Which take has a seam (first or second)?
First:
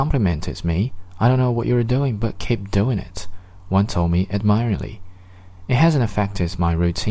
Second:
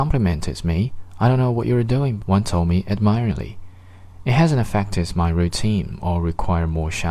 second